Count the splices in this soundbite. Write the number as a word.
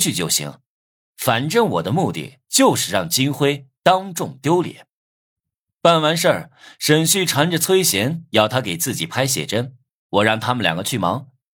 zero